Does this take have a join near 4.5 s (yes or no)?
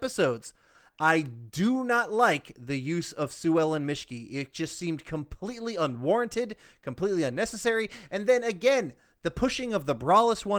no